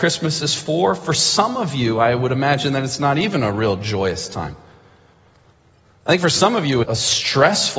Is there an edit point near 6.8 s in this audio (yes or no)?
yes